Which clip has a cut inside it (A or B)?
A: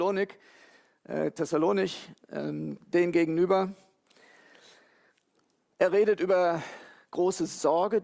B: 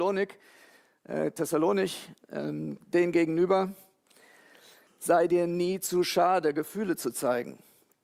B